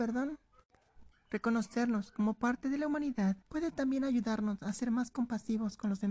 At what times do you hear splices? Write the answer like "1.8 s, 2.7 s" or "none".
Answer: 1.1 s, 3.4 s